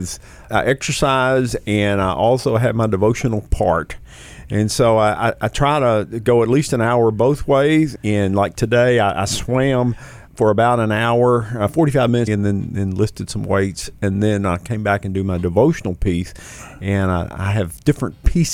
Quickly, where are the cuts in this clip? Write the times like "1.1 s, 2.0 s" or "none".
12.3 s